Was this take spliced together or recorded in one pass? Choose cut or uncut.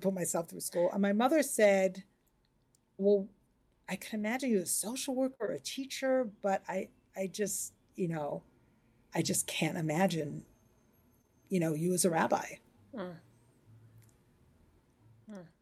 cut